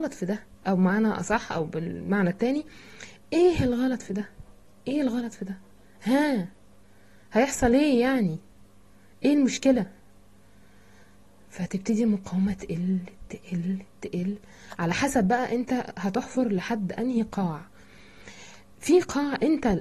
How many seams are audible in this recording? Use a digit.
0